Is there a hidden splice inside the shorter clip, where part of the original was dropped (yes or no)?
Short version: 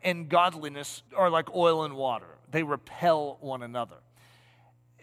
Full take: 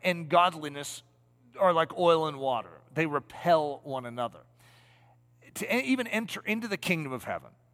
yes